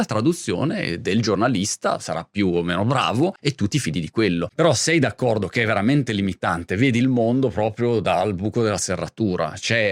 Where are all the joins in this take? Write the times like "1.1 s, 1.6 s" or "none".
none